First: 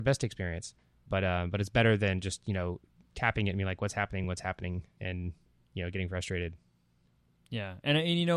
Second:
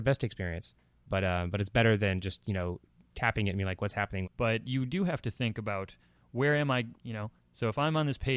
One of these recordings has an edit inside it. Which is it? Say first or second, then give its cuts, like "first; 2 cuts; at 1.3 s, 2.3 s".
second; 2 cuts; at 4.2 s, 6.9 s